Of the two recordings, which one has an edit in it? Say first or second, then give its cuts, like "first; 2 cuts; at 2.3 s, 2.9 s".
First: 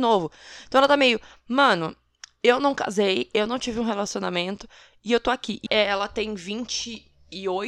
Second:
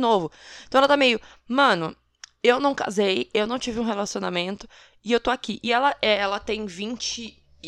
first; 1 cut; at 5.7 s